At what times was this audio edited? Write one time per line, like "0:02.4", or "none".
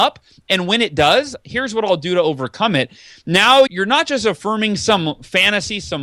0:03.7